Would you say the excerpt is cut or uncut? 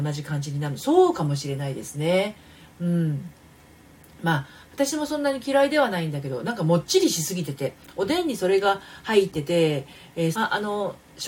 cut